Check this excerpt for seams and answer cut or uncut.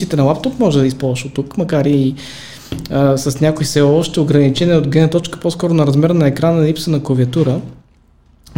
uncut